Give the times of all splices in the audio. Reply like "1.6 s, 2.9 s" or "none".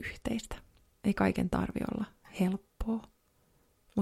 0.9 s